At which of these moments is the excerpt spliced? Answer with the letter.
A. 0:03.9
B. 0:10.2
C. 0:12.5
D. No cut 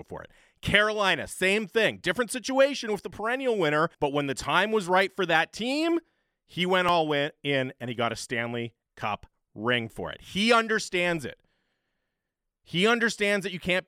A